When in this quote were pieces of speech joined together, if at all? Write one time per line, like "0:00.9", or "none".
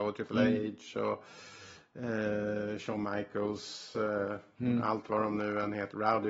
none